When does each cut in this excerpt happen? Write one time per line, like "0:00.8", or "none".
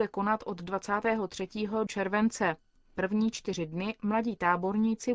0:01.9